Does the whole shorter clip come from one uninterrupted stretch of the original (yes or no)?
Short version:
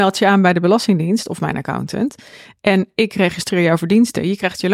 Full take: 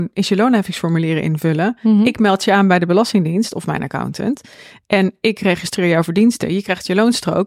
yes